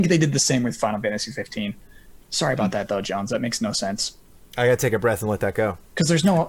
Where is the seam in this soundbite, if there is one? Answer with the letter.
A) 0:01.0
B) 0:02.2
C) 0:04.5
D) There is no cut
B